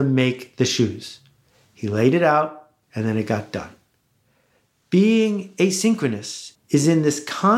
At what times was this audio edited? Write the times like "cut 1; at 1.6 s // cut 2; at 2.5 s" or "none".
cut 1; at 6.5 s